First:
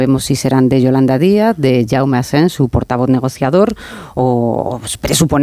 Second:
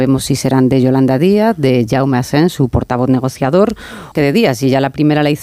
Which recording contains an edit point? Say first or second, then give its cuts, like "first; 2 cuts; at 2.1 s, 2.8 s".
second; 1 cut; at 4.1 s